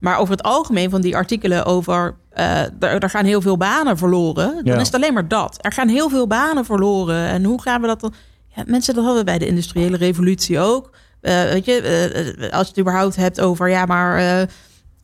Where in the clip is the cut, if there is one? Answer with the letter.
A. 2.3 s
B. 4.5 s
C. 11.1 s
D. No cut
D